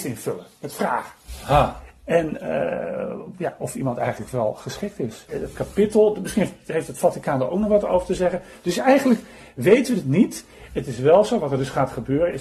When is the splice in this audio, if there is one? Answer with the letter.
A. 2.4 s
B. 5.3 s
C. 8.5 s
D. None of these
B